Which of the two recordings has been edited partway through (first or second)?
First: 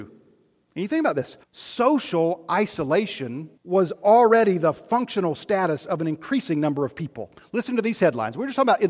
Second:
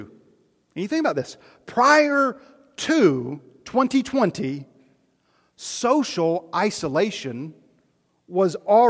first